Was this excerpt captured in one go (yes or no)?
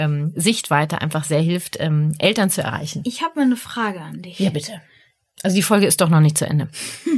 yes